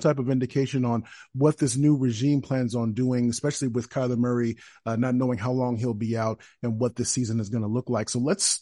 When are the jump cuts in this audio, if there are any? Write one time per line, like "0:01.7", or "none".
none